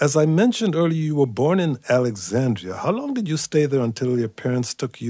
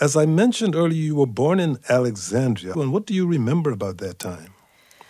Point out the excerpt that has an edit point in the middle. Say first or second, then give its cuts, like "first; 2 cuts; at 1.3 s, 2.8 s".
second; 1 cut; at 2.7 s